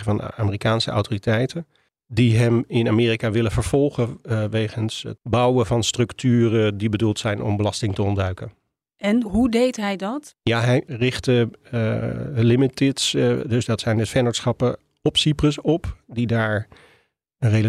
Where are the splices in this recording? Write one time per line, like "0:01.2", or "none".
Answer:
0:09.2